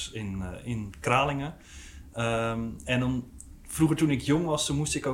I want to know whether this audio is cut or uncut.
uncut